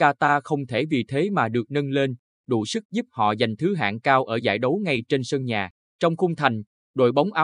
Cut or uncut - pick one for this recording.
cut